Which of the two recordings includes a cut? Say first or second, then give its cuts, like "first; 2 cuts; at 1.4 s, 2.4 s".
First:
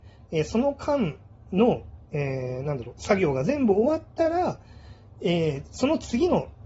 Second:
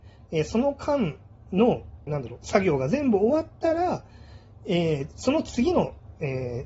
second; 1 cut; at 2.1 s